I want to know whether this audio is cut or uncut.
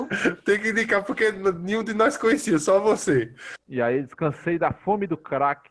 cut